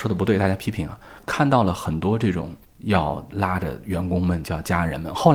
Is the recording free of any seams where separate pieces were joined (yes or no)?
yes